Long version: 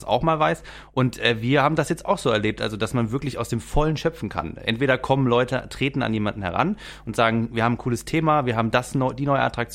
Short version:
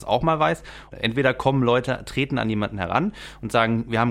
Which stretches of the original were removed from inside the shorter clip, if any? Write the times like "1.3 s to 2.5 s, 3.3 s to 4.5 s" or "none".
0.9 s to 4.6 s

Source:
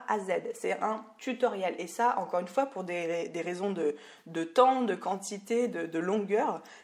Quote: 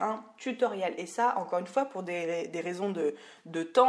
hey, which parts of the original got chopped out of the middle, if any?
none

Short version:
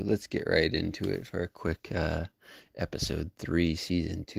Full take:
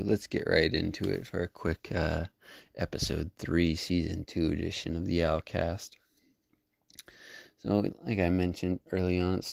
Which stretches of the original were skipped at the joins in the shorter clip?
none

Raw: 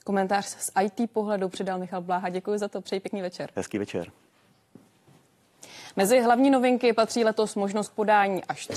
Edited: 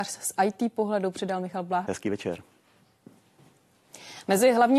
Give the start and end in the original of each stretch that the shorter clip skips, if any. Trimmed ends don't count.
2.2 s to 3.5 s

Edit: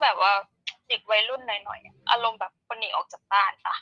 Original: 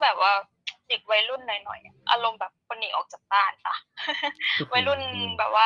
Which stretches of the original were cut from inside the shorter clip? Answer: none

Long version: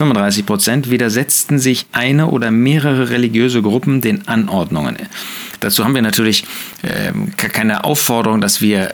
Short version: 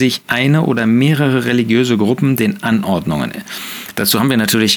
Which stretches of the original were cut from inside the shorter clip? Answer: none

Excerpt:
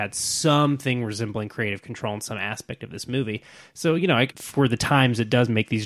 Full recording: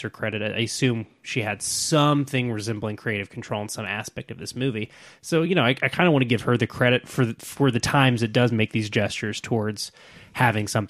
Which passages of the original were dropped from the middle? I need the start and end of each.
5.8 s to 7.3 s

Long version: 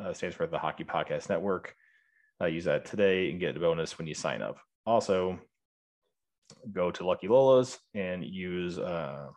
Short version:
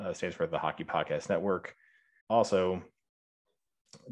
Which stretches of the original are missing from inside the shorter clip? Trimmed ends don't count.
2.2 s to 4.8 s

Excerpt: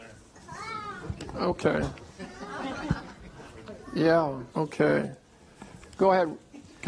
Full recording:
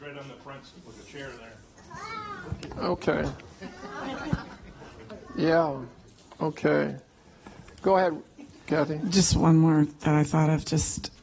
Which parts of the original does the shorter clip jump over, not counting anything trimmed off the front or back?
5.9 s to 6.3 s

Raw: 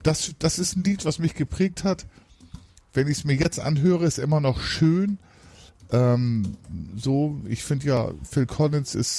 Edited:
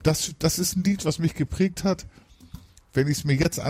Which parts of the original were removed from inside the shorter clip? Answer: none

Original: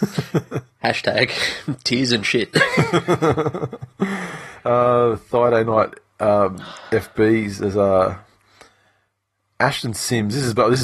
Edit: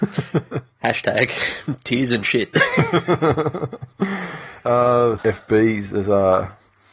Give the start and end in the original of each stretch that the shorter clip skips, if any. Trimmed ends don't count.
5.2 s to 6.8 s

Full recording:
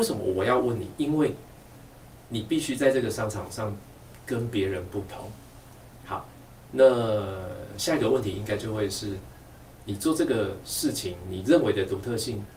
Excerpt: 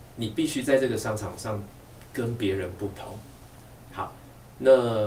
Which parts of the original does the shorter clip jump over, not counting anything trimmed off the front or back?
none

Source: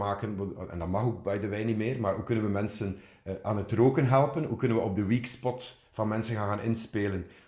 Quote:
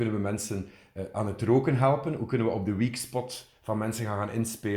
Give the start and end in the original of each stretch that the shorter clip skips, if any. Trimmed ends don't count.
none

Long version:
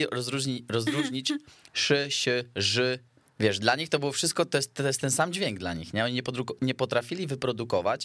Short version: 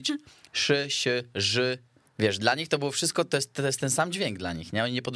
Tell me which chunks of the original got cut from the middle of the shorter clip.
none

